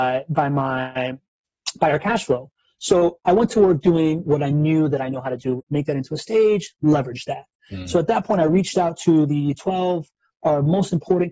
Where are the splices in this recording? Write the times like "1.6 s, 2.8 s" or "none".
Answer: 5.6 s